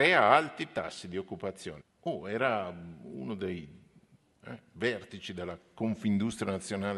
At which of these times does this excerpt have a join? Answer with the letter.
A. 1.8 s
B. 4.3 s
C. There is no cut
A